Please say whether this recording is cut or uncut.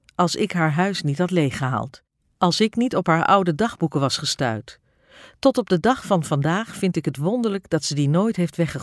uncut